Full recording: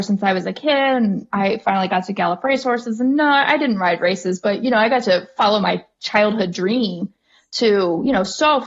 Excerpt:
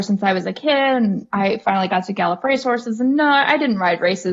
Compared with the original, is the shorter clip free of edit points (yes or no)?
yes